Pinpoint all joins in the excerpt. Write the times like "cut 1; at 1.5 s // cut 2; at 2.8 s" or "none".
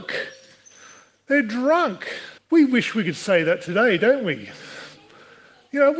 cut 1; at 2.4 s